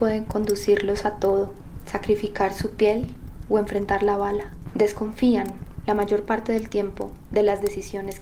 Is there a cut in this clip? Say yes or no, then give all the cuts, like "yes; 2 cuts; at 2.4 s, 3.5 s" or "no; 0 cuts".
yes; 1 cut; at 4.7 s